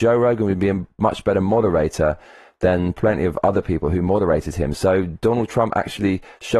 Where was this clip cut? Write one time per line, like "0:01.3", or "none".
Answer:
none